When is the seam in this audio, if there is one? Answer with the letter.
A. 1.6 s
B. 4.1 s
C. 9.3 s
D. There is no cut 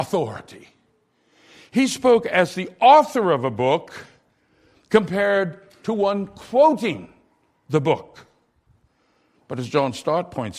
C